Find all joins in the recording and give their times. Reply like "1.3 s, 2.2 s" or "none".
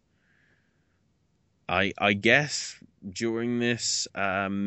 none